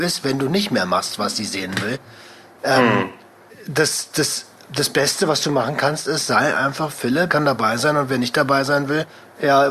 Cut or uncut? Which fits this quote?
cut